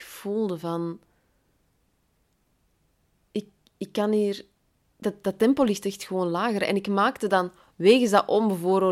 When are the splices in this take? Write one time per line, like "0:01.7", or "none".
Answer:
none